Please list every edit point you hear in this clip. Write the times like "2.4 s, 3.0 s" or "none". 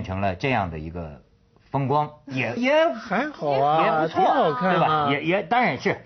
2.6 s